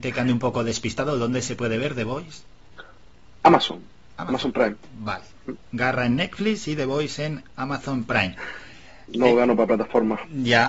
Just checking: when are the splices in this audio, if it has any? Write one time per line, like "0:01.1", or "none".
none